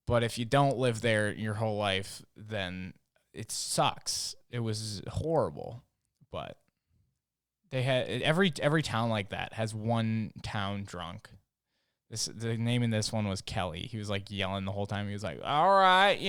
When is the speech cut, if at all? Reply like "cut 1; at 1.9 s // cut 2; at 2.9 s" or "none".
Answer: none